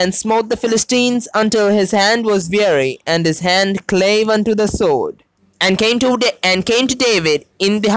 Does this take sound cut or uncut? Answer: cut